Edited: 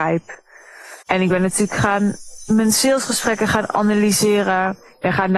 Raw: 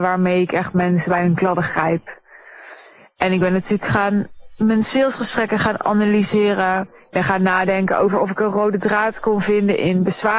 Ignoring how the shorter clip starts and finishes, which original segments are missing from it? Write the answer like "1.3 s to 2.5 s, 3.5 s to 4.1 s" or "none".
2.8 s to 3.1 s